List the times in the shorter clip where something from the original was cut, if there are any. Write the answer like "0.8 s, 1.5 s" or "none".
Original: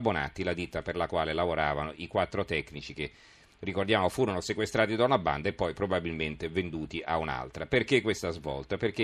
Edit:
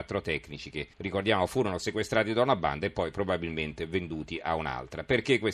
0.9 s